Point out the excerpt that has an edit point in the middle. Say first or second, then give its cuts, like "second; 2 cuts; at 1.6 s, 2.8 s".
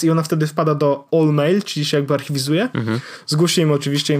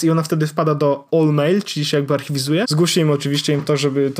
second; 1 cut; at 2.6 s